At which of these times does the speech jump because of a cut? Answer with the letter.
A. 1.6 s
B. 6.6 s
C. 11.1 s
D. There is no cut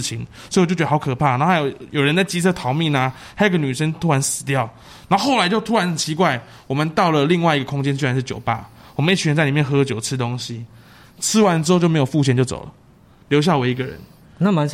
C